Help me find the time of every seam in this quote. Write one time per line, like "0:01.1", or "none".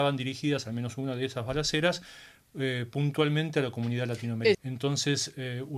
0:04.5